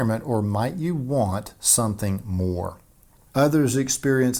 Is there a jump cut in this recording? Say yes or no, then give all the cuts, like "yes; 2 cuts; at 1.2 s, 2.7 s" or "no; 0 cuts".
yes; 1 cut; at 3.3 s